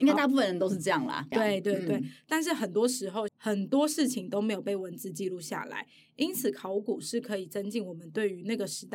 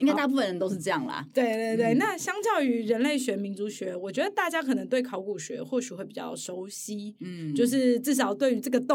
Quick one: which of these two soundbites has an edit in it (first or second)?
first